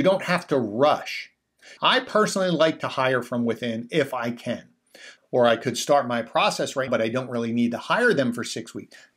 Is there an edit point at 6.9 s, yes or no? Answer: yes